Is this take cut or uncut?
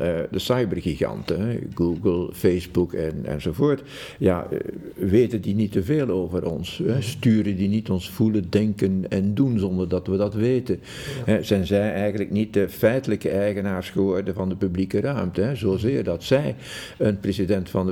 uncut